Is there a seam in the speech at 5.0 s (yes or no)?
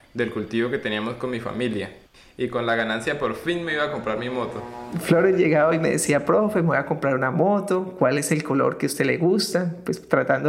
no